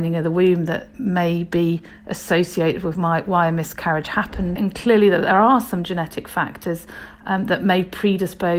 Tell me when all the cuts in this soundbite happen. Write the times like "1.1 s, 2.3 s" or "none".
4.6 s

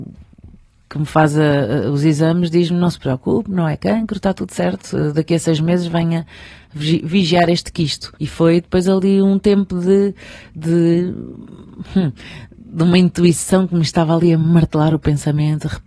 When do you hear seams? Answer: 8.2 s

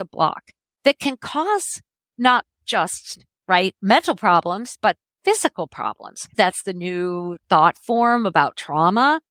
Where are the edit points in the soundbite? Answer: 6.3 s, 7.4 s

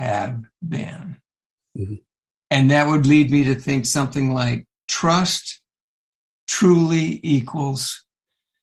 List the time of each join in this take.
none

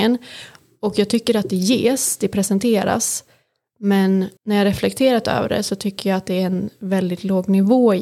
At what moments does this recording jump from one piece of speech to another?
4.4 s

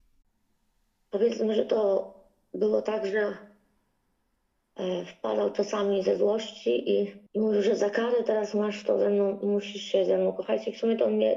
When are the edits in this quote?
7.3 s

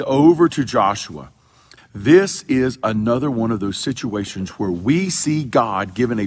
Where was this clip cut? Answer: 1.8 s

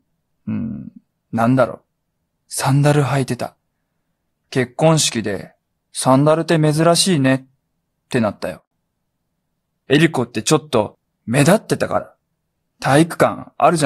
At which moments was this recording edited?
4.3 s, 9.7 s, 11.2 s

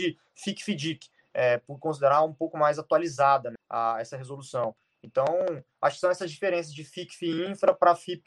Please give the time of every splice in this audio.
3.6 s

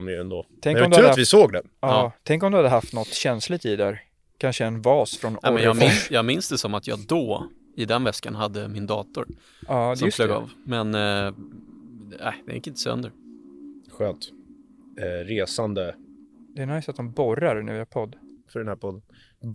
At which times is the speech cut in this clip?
15.0 s, 18.5 s

